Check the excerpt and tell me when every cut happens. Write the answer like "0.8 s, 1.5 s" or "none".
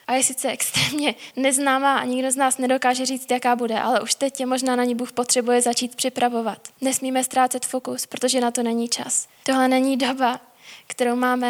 6.7 s, 9.4 s

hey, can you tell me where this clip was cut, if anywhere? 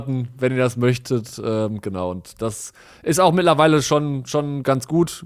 none

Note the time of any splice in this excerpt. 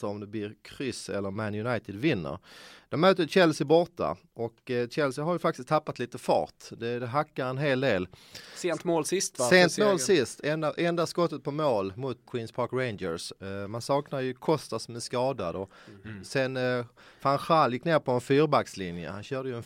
12.2 s, 16.0 s

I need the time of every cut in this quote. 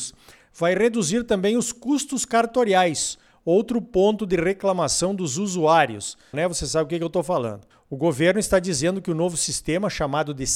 6.3 s, 7.7 s

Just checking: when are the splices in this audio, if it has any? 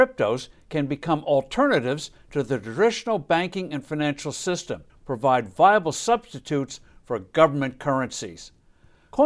4.9 s

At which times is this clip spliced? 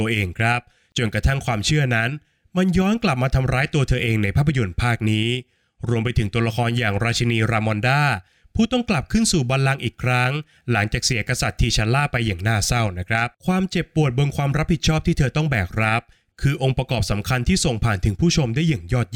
13.3 s

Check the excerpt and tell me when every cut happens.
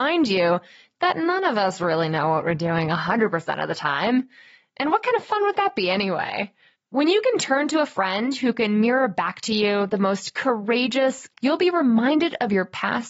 11.3 s

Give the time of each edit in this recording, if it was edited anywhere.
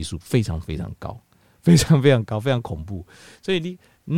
none

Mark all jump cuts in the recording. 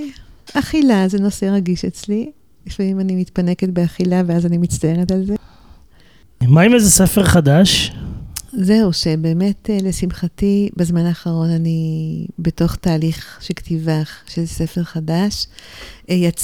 none

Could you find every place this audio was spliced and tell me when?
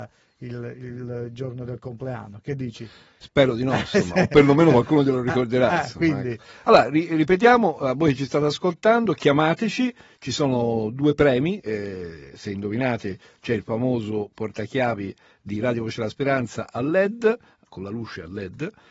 11.6 s, 17.7 s

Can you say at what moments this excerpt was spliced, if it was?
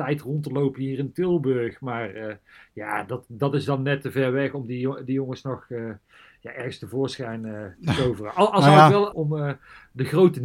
9.1 s

